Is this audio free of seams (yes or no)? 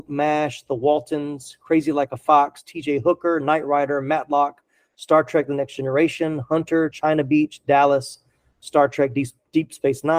yes